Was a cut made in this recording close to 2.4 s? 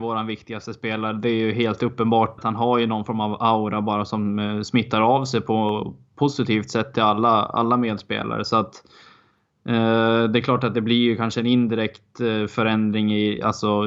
yes; 1 cut; at 2.4 s

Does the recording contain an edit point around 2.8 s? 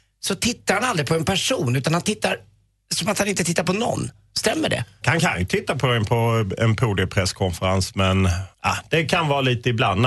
no; 2 cuts; at 5.0 s, 8.5 s

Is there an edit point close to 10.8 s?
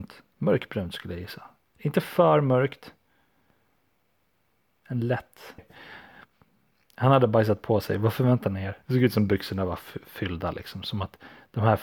no; 2 cuts; at 5.6 s, 8.8 s

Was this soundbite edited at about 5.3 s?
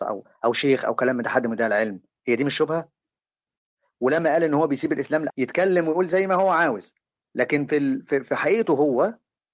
yes; 1 cut; at 5.3 s

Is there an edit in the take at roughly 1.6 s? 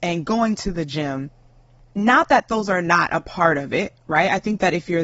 no; 0 cuts

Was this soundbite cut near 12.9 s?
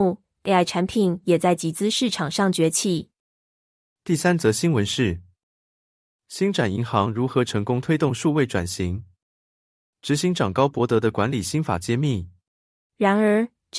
yes; 1 cut; at 12.9 s

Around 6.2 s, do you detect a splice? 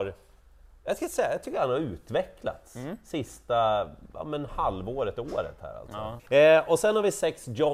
yes; 1 cut; at 6.2 s

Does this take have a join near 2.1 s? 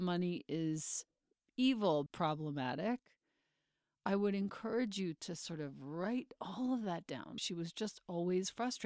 yes; 2 cuts; at 2.1 s, 7.4 s

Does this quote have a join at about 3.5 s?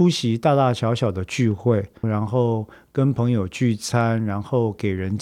no; 1 cut; at 2.0 s

